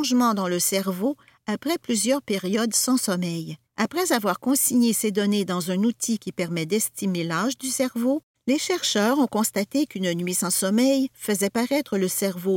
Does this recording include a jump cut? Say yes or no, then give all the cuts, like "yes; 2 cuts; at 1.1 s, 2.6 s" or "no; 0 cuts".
yes; 2 cuts; at 3.6 s, 8.3 s